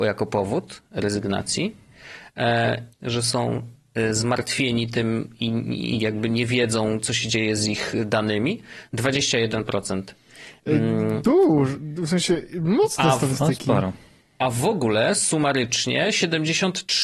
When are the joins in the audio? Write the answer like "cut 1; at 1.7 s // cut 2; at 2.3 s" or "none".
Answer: cut 1; at 2.9 s